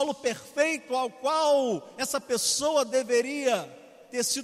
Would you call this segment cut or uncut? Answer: uncut